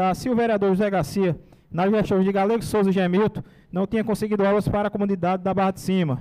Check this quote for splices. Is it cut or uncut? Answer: uncut